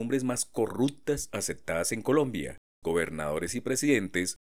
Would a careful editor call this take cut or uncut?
cut